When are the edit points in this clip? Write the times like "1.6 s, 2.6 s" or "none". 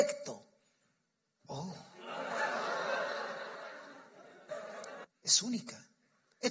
1.4 s, 5.0 s